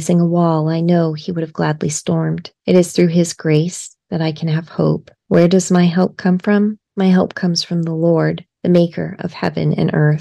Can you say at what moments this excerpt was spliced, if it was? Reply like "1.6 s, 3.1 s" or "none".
2.5 s, 5.2 s